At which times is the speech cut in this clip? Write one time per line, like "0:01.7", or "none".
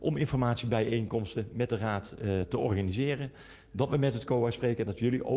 0:02.4